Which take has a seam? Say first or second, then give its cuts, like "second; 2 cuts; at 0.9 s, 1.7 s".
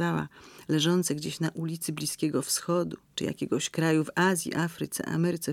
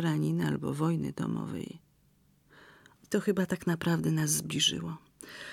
second; 1 cut; at 3.0 s